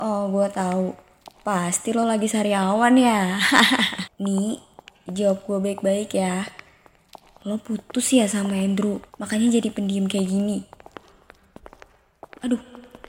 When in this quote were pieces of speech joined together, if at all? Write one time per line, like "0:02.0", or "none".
0:04.1
0:09.1